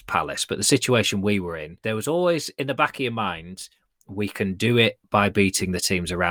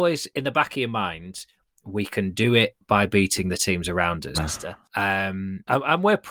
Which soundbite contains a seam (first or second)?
second